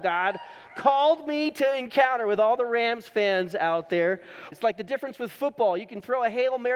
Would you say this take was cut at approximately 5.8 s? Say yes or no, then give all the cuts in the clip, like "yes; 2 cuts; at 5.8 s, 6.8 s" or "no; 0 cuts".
no; 1 cut; at 4.5 s